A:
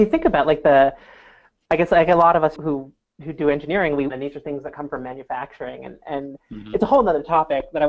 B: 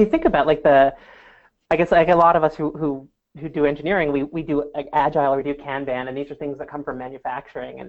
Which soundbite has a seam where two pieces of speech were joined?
A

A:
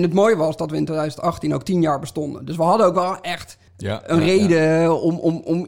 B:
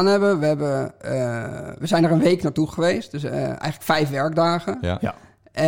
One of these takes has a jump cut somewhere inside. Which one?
A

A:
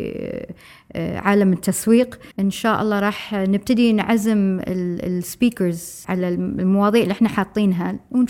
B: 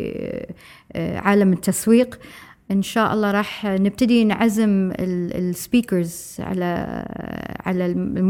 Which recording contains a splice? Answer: A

